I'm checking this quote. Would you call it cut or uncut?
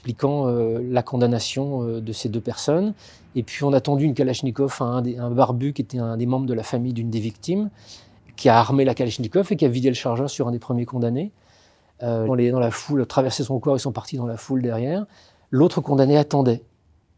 cut